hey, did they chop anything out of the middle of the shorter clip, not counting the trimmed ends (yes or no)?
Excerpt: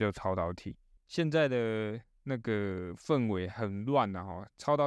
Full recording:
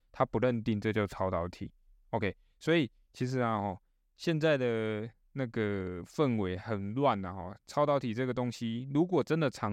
yes